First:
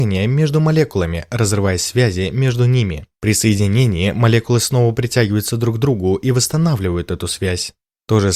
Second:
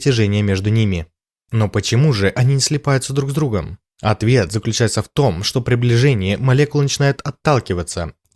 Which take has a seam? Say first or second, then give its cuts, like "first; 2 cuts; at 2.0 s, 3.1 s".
second; 1 cut; at 1.4 s